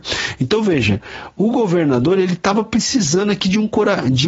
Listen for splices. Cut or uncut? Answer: uncut